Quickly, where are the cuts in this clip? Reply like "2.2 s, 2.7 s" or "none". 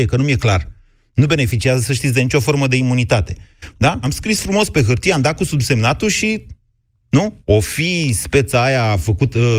4.0 s, 7.4 s